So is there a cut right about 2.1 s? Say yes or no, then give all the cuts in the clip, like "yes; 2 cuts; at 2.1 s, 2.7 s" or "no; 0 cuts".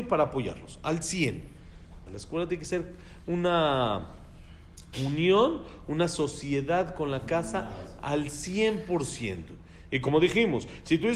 yes; 1 cut; at 2.1 s